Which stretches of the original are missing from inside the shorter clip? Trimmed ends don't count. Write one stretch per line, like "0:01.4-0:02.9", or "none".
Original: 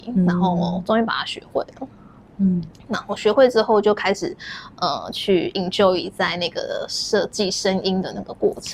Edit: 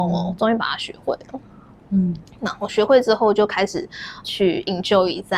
0:04.7-0:05.1